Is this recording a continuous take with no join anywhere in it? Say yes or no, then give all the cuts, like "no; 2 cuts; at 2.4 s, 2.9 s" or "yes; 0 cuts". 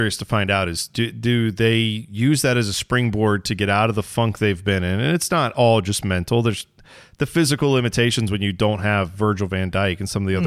yes; 0 cuts